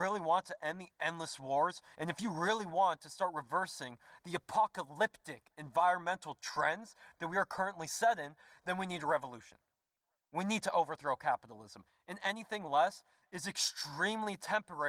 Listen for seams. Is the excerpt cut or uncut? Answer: cut